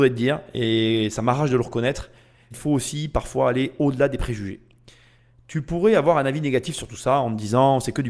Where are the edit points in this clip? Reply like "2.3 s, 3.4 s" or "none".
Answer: 2.5 s

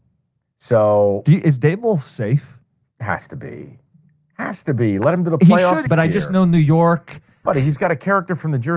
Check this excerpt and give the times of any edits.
5.9 s, 7.5 s

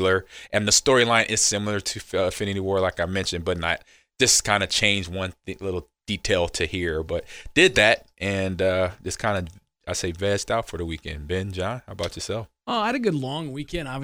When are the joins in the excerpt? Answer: none

